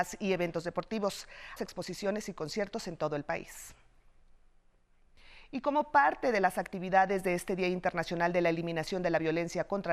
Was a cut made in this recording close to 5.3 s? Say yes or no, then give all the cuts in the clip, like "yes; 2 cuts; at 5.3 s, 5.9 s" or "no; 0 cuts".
no; 1 cut; at 1.6 s